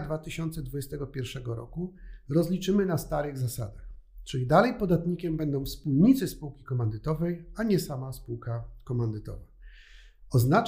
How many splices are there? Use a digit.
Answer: 0